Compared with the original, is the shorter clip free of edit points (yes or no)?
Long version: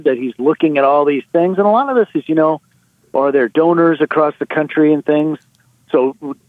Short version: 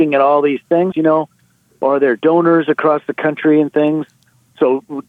no